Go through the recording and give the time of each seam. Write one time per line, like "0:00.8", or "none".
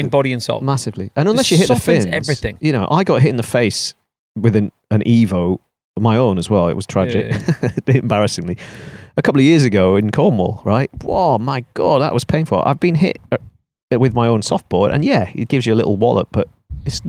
none